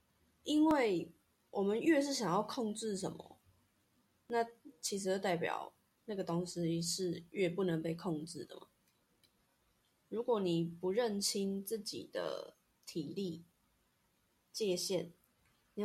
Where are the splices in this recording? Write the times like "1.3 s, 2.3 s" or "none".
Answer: none

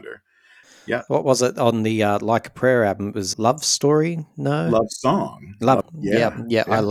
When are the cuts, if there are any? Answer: 3.3 s, 5.8 s

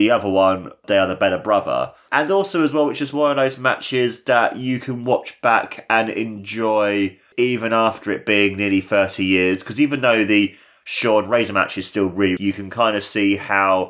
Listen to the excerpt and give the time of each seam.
12.4 s

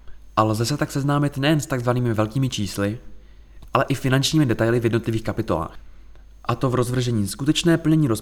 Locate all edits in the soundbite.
none

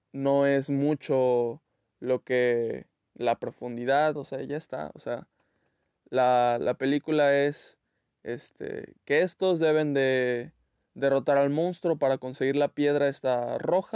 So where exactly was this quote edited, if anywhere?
4.2 s

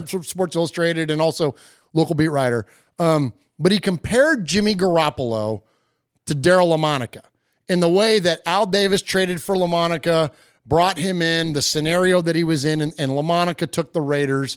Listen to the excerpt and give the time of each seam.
none

